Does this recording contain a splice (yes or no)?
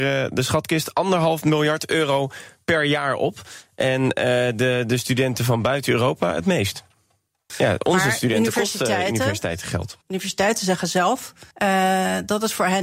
yes